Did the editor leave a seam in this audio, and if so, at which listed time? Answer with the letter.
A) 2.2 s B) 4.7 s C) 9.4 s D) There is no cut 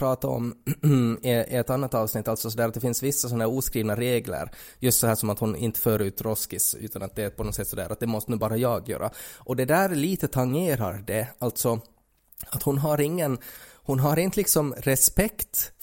D